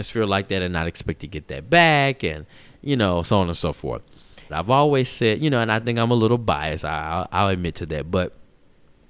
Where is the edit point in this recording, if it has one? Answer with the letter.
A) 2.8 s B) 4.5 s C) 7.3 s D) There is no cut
B